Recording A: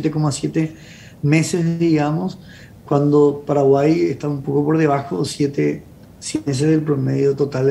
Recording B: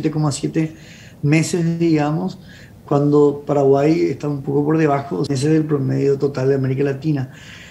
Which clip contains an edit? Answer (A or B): B